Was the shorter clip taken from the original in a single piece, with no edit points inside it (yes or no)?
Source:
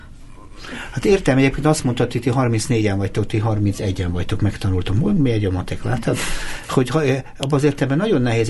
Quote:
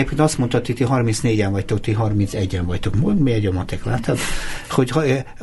no